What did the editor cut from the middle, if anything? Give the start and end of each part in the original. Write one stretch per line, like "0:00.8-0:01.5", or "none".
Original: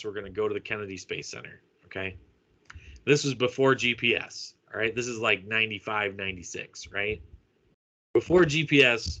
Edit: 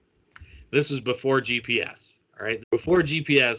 0:04.9-0:08.0